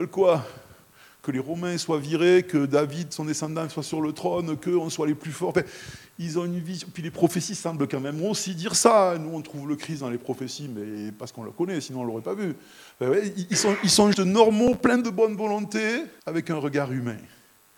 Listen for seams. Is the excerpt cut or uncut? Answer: cut